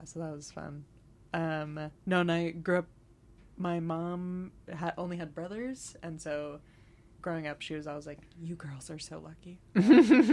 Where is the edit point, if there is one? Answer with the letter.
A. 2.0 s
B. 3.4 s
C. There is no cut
A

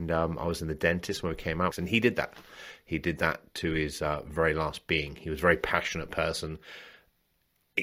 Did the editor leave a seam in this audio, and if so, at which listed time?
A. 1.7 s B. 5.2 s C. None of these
A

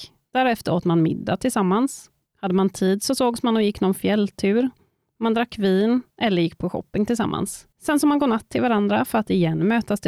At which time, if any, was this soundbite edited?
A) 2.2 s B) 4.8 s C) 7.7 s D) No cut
C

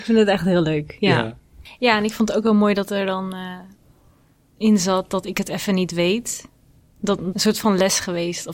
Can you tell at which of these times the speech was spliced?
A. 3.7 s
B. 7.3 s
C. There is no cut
B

